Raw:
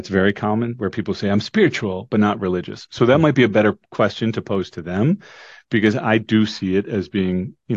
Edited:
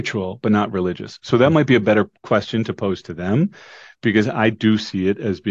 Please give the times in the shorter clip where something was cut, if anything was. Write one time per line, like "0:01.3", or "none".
none